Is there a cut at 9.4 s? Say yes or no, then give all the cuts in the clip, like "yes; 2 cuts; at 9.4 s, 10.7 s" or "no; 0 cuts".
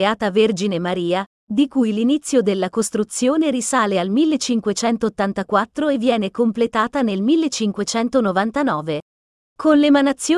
yes; 1 cut; at 9.4 s